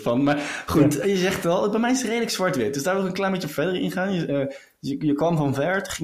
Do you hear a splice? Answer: no; 0 cuts

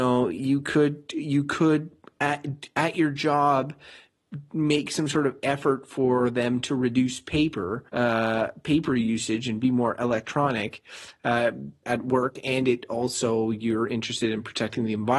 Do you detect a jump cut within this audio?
yes; 2 cuts; at 7.9 s, 11.8 s

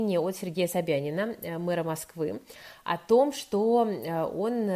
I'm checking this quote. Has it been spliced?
no; 0 cuts

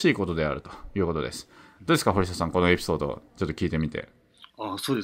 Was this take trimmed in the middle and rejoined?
no; 0 cuts

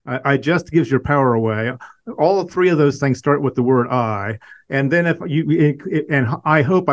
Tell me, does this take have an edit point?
no; 0 cuts

